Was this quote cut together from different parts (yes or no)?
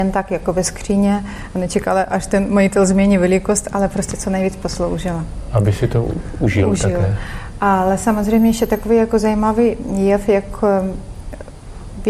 no